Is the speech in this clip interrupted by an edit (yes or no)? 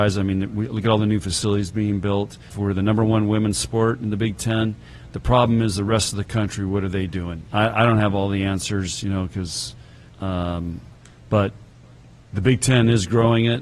yes